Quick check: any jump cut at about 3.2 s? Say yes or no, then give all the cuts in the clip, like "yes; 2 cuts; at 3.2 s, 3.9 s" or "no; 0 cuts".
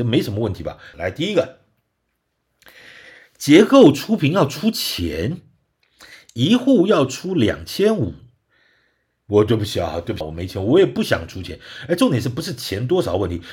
no; 2 cuts; at 0.9 s, 10.2 s